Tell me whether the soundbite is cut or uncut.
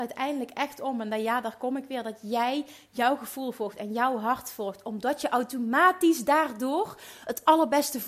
uncut